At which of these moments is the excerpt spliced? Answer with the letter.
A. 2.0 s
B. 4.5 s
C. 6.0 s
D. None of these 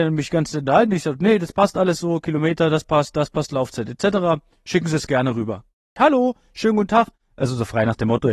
C